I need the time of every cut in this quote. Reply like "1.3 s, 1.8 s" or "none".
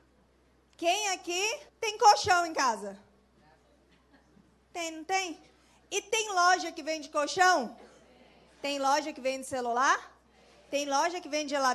1.7 s